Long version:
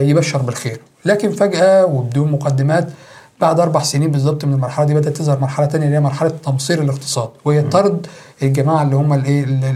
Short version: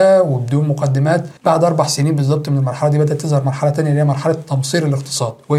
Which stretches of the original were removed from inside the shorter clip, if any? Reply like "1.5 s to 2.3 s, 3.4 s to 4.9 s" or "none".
3.0 s to 3.3 s